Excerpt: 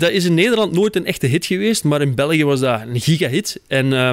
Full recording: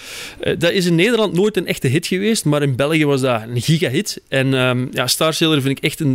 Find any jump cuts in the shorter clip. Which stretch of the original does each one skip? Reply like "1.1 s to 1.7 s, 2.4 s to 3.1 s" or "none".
none

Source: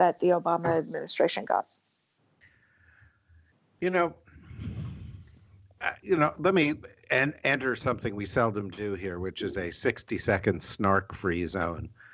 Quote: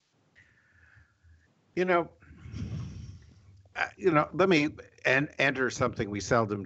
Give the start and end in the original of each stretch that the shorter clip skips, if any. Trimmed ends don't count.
none

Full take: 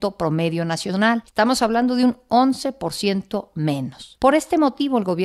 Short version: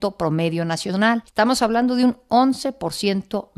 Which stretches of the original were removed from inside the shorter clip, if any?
none

